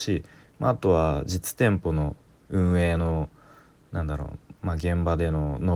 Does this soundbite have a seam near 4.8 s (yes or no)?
no